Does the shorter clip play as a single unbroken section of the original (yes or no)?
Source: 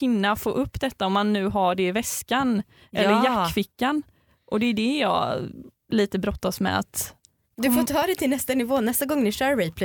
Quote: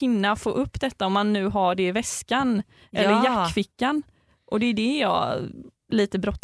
yes